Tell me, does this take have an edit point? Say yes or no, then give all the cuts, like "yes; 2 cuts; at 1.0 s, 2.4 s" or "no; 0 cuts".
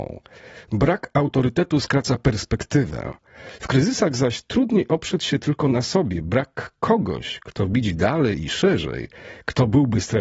no; 0 cuts